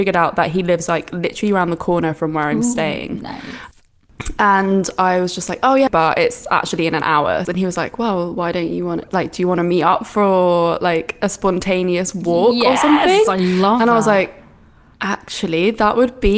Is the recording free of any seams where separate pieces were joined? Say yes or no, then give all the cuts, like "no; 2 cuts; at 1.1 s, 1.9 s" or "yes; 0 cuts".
no; 2 cuts; at 5.9 s, 7.5 s